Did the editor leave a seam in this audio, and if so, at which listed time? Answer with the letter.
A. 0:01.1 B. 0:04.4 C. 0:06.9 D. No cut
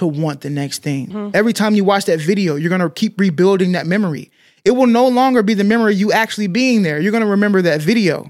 A